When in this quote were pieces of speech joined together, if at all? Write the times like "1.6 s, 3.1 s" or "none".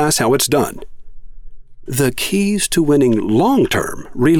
1.9 s